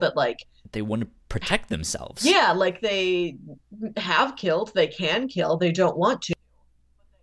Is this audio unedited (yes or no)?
yes